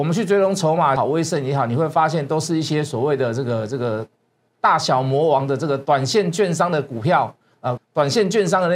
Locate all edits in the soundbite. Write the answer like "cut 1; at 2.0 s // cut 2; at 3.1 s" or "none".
cut 1; at 1.0 s // cut 2; at 7.8 s